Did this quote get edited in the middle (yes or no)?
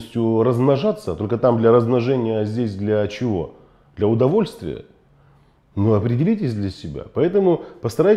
no